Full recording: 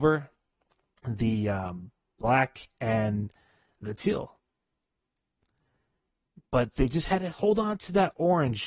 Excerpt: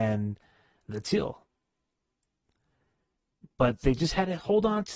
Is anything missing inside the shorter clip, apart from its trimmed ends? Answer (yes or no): no